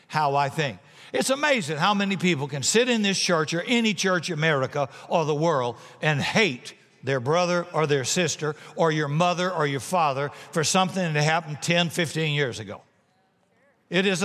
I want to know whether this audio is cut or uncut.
uncut